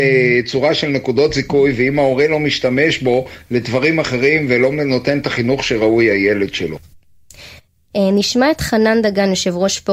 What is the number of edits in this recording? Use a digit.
1